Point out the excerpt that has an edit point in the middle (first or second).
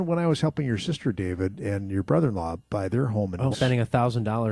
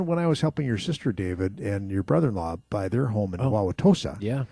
first